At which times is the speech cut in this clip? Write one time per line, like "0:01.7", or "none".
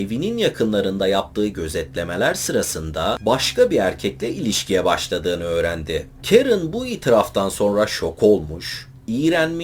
0:06.2